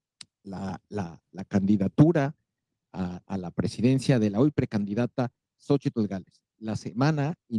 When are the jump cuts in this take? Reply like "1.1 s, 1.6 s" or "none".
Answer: none